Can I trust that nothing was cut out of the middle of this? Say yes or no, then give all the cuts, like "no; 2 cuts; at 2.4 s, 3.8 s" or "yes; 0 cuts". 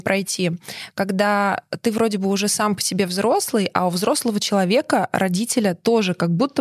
yes; 0 cuts